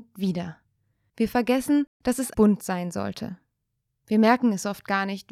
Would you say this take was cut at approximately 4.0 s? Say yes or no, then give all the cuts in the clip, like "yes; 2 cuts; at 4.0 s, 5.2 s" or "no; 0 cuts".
yes; 3 cuts; at 1.1 s, 2.3 s, 4.0 s